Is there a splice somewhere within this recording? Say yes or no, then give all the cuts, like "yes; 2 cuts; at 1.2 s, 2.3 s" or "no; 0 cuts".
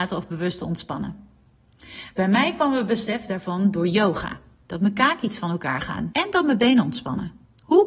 yes; 2 cuts; at 4.6 s, 6.1 s